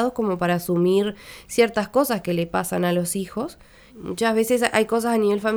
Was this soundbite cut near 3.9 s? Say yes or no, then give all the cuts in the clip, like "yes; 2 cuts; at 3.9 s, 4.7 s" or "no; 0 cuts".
yes; 1 cut; at 3.9 s